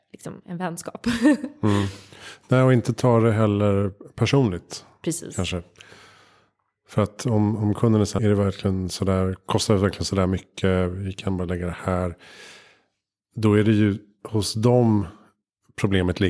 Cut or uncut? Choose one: cut